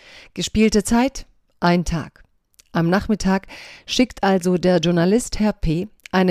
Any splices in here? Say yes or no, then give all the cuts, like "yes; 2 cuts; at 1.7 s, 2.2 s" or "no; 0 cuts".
no; 0 cuts